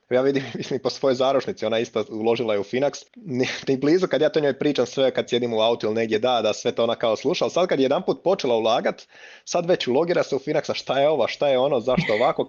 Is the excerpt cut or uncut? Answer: cut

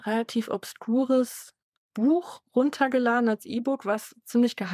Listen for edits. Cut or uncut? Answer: uncut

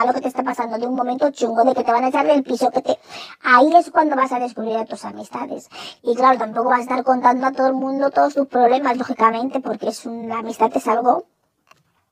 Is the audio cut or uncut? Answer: cut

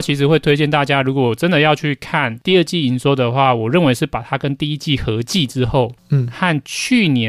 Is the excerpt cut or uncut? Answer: uncut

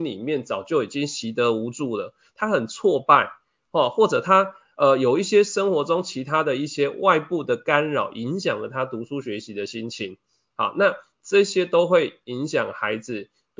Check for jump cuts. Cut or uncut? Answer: uncut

